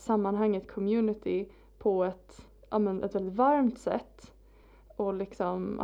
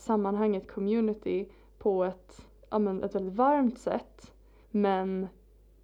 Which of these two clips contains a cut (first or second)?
second